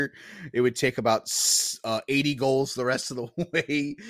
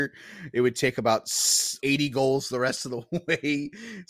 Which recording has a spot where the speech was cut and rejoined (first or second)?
second